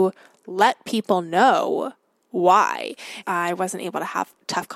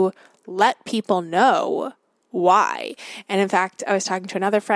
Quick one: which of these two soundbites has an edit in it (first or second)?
first